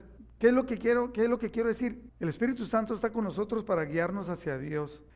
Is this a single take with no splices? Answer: no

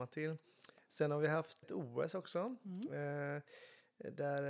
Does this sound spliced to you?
yes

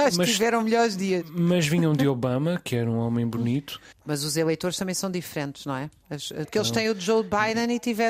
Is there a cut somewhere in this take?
yes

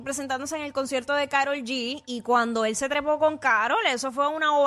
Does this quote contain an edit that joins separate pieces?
no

